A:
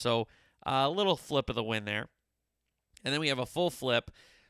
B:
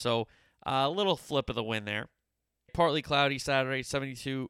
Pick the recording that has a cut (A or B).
B